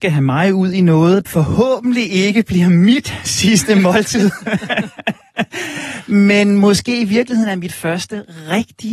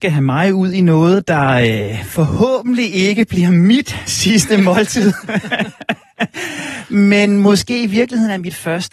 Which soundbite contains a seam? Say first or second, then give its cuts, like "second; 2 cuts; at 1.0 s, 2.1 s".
first; 1 cut; at 1.2 s